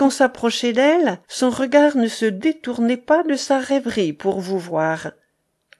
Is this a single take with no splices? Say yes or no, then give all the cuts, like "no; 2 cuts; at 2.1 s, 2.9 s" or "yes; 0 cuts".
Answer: no; 1 cut; at 1.2 s